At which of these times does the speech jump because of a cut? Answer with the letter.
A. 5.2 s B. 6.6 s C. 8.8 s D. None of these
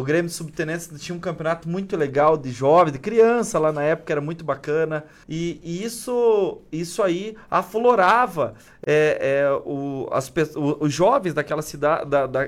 A